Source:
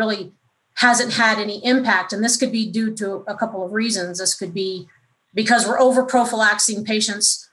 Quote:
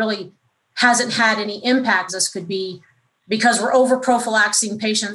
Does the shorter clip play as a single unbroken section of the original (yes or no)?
no